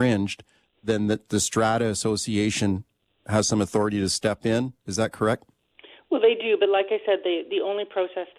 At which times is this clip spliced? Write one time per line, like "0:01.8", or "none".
none